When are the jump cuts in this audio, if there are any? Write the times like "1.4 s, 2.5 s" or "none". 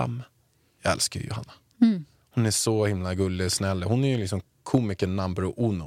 none